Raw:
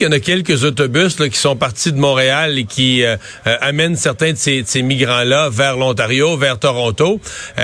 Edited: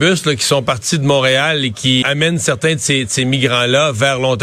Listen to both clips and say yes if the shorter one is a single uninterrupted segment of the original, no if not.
no